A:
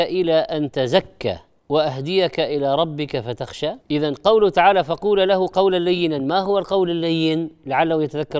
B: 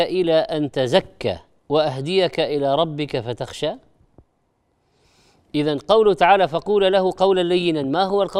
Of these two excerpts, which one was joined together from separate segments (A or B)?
A